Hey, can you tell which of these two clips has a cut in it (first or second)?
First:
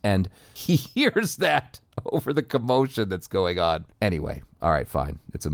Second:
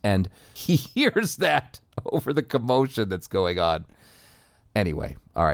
first